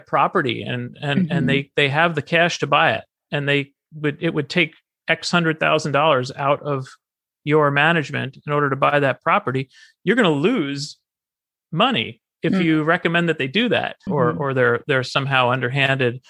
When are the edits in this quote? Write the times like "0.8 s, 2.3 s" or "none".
14.1 s